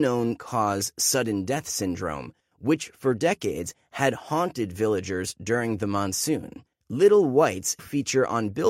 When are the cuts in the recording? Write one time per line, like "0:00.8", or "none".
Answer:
0:07.8